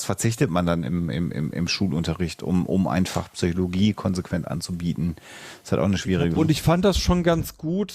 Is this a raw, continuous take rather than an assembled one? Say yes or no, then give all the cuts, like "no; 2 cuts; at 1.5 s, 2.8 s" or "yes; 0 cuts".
no; 1 cut; at 6.4 s